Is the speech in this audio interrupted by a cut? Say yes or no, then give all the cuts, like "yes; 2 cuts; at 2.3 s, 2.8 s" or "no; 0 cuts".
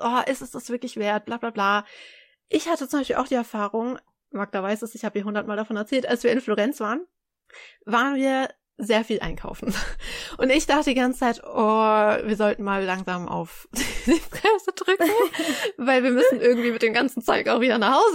no; 0 cuts